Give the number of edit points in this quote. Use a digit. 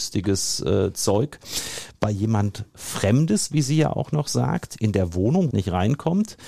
1